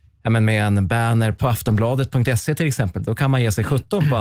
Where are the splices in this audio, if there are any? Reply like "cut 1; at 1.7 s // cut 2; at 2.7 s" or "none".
none